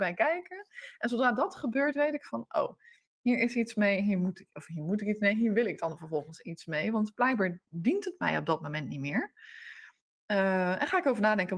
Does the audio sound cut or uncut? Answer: uncut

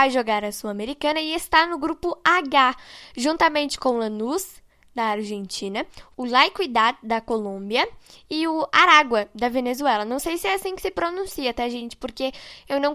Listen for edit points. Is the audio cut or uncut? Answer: uncut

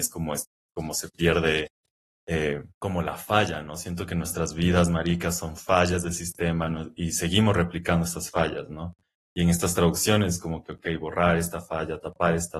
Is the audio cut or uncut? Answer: cut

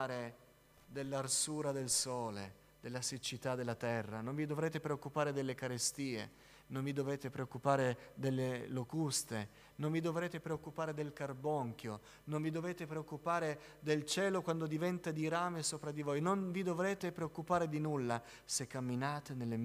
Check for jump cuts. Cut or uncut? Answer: uncut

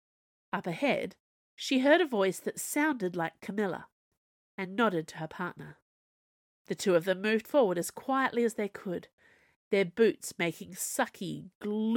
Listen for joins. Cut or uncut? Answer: uncut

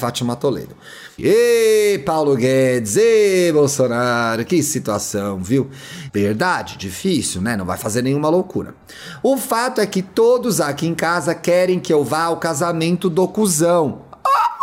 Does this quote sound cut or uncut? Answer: cut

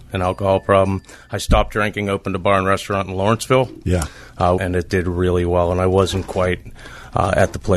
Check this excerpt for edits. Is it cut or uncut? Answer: cut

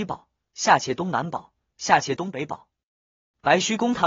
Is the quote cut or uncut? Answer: uncut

